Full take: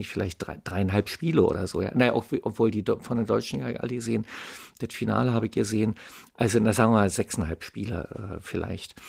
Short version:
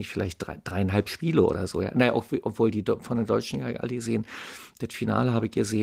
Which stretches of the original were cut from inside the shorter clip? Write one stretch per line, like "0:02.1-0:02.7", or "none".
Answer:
none